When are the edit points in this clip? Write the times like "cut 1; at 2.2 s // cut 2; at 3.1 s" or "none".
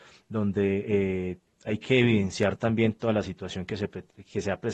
none